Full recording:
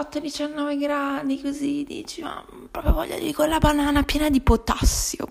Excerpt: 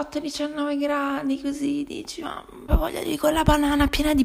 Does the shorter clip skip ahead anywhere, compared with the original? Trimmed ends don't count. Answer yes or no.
yes